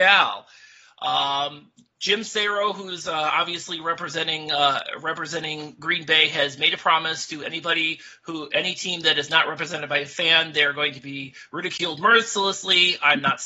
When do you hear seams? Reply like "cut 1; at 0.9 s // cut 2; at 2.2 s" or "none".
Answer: none